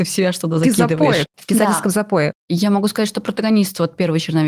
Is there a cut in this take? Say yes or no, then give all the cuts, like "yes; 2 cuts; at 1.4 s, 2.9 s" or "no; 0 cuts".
yes; 2 cuts; at 1.3 s, 2.4 s